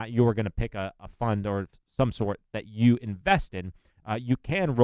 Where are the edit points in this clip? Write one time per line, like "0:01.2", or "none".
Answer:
none